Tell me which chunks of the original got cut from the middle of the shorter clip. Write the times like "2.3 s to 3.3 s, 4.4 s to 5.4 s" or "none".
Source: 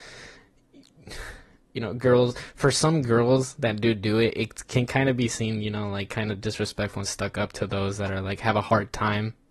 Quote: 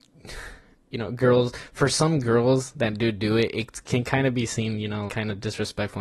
5.9 s to 6.1 s